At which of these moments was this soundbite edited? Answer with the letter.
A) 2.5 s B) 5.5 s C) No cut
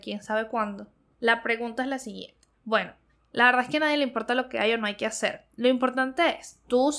A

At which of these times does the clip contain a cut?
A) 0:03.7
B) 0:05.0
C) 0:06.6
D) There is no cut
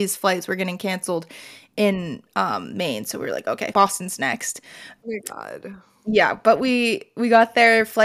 A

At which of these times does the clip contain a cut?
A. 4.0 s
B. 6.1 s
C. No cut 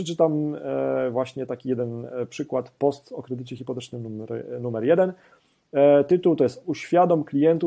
C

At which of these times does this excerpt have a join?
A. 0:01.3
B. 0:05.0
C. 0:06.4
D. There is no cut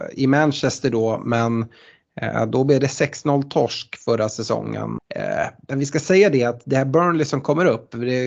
B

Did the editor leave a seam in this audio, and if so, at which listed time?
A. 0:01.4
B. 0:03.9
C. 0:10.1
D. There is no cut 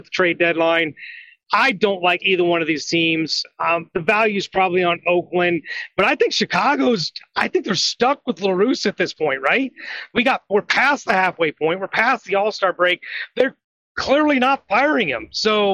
D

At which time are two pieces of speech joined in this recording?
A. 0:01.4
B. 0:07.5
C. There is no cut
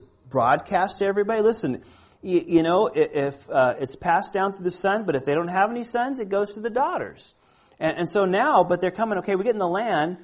C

